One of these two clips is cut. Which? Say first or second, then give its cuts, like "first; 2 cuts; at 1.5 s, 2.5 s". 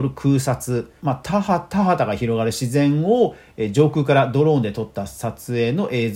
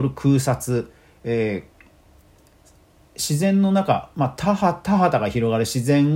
first; 1 cut; at 1.0 s